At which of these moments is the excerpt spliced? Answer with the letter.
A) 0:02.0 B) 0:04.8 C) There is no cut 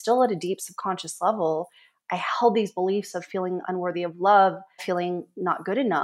B